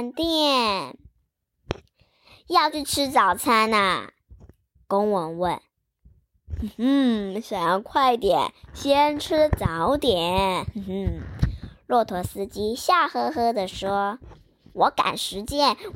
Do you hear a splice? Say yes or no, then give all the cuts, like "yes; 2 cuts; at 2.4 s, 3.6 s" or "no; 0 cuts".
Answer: no; 0 cuts